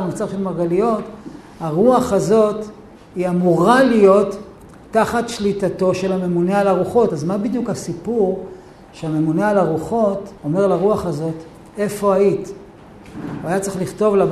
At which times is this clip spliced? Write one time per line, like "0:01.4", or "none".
0:07.1
0:10.4

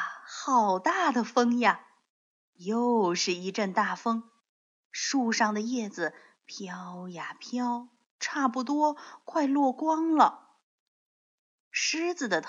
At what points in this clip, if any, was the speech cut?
0:02.4

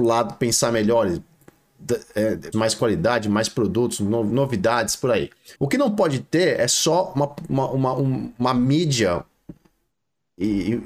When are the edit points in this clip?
0:02.5
0:05.5

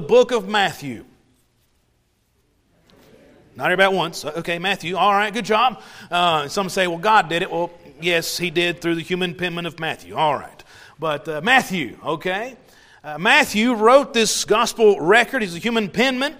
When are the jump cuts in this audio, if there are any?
none

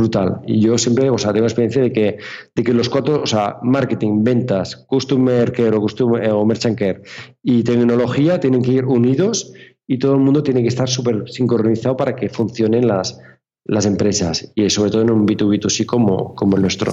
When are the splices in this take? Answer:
none

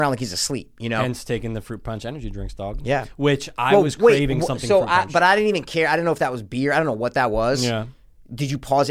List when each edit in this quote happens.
none

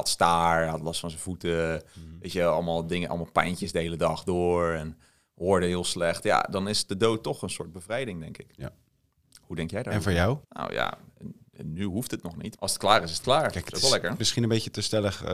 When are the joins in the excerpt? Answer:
0:10.4
0:12.6

